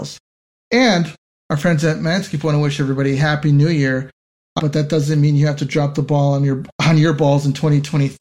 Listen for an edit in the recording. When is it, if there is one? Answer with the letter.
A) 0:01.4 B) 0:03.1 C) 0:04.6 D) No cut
C